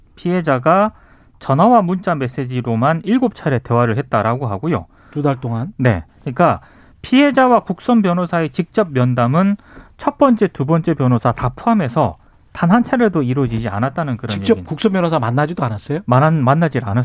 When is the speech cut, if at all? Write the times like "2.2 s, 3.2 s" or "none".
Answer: 6.1 s